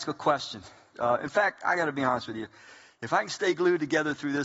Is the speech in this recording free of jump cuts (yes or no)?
no